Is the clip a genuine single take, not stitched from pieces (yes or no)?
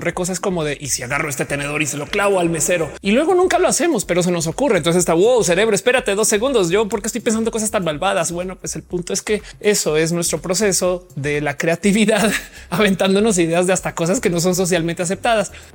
yes